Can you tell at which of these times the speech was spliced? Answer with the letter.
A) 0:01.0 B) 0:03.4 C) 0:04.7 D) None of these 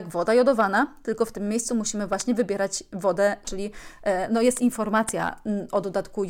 B